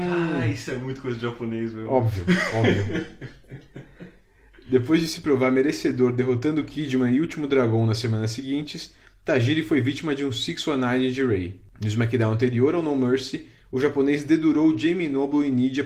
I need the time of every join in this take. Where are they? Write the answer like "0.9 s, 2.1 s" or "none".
none